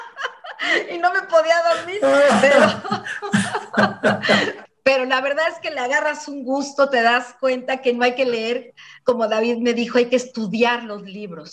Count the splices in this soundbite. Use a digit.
1